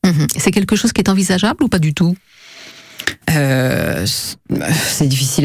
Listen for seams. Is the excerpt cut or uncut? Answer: cut